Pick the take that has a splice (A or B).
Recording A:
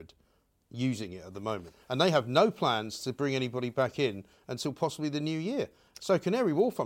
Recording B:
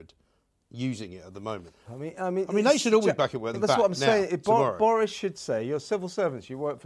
B